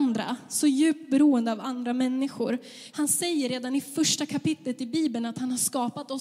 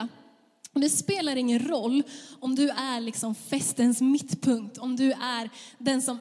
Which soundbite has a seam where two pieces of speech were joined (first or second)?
first